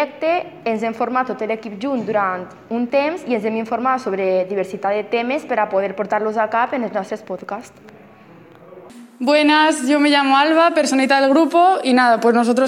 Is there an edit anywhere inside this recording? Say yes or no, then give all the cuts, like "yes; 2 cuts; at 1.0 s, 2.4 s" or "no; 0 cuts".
no; 0 cuts